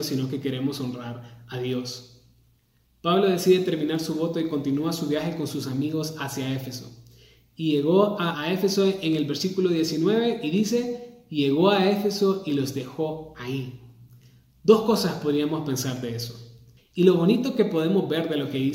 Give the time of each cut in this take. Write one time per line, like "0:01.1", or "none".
0:08.3
0:16.8